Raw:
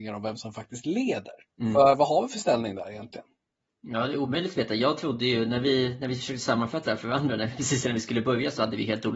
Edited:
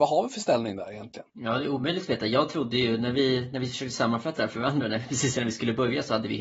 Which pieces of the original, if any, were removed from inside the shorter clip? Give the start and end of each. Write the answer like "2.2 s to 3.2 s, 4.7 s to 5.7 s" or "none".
3.3 s to 3.8 s

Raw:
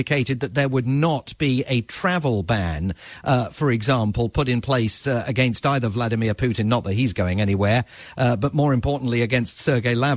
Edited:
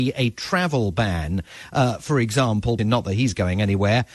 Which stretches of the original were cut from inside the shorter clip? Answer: 4.3 s to 6.6 s

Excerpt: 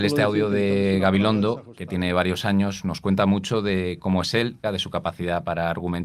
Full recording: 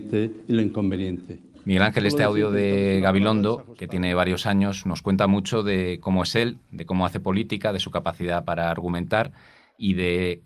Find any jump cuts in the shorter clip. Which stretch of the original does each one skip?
6.6 s to 7.6 s

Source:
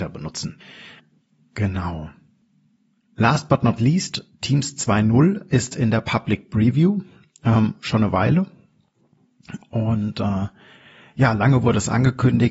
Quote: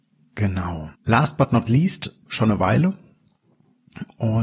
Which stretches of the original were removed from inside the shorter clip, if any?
2.1 s to 3.1 s, 4.4 s to 7.8 s

